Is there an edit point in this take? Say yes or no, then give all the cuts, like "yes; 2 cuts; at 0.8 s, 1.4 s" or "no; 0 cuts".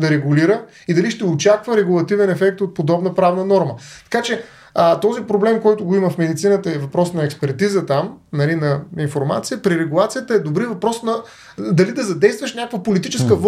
no; 0 cuts